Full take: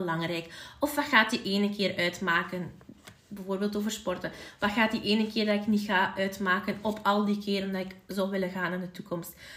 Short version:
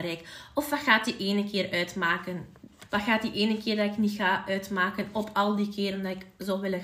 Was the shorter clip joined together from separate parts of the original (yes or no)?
yes